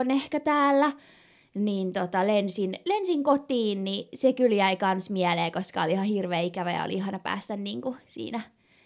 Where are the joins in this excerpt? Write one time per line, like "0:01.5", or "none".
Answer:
none